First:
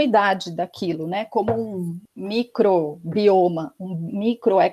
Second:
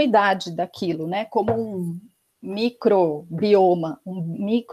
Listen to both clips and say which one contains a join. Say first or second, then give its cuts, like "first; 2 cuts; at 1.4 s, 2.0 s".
first; 1 cut; at 2.1 s